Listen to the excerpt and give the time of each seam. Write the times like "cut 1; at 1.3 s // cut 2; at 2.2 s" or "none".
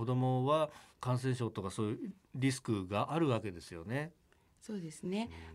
cut 1; at 0.9 s